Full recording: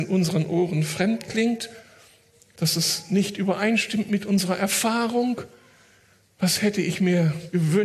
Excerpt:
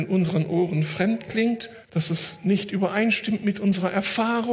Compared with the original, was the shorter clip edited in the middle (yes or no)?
yes